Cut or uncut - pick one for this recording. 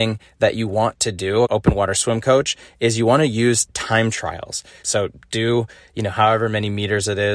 cut